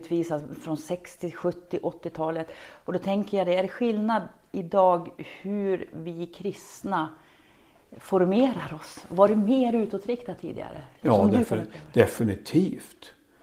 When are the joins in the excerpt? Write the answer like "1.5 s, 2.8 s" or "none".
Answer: none